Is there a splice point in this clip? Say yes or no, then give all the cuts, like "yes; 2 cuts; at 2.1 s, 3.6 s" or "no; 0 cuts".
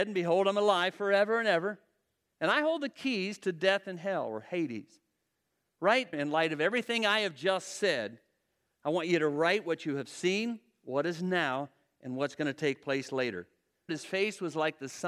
yes; 2 cuts; at 6.1 s, 13.9 s